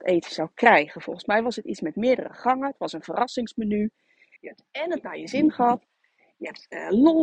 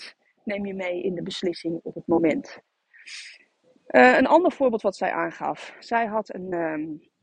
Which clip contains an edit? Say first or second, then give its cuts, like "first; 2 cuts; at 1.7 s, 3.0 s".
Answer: first; 1 cut; at 4.4 s